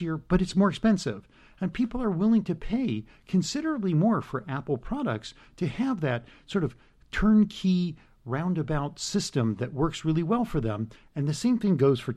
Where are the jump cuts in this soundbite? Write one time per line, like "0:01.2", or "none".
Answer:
none